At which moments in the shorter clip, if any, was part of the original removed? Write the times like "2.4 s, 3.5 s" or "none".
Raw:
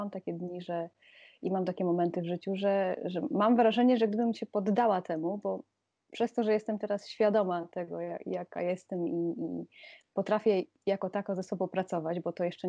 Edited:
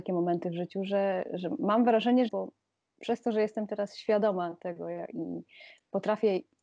2.3 s, 5.1 s

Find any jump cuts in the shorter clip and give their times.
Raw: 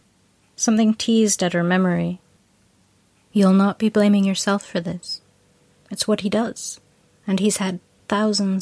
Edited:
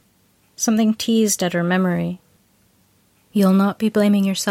none

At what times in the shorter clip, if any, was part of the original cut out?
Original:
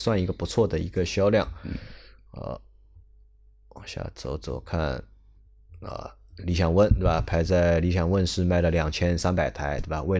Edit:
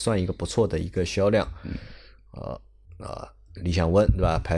2.9 s

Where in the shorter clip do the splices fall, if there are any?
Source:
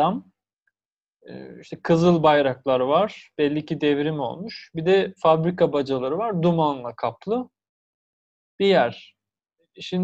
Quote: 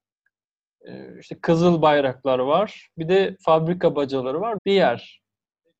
2.9 s, 4.6 s

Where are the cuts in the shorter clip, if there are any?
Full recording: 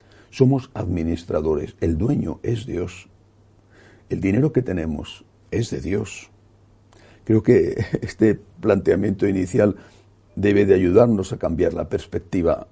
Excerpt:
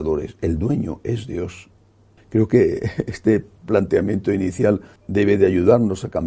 2.2 s, 5.0 s

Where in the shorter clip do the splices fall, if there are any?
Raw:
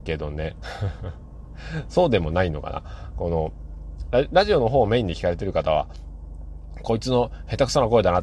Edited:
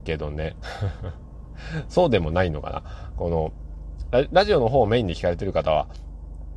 none

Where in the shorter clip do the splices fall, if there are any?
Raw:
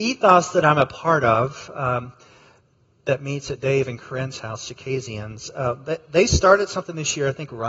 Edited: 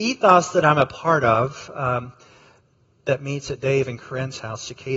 none

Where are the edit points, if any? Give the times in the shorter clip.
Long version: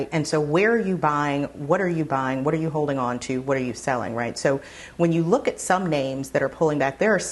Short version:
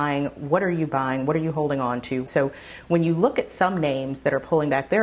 2.3 s

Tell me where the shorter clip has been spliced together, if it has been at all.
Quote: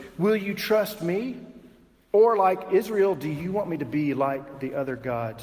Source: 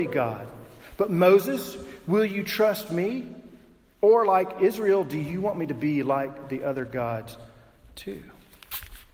none

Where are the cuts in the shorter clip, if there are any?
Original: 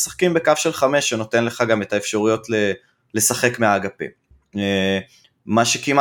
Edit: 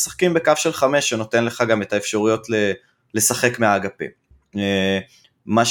none

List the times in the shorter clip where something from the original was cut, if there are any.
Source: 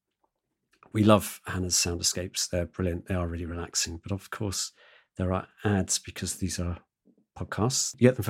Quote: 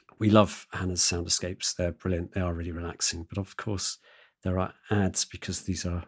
none

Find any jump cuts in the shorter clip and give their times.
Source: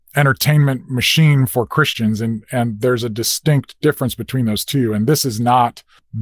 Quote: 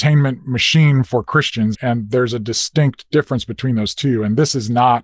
1.7 s

